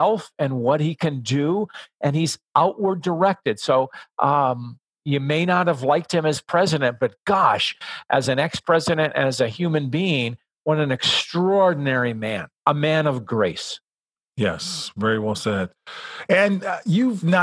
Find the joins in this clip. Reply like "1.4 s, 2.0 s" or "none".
none